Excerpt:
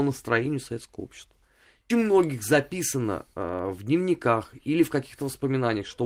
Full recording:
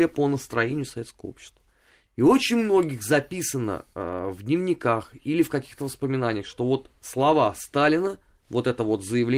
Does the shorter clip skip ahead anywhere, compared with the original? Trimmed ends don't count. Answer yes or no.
yes